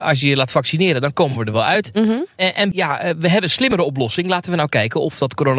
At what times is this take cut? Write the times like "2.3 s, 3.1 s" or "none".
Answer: 2.7 s